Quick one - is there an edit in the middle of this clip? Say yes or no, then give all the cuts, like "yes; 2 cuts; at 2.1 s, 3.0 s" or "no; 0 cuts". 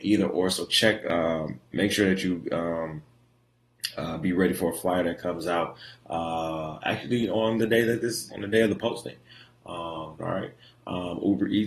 yes; 2 cuts; at 8.3 s, 10.2 s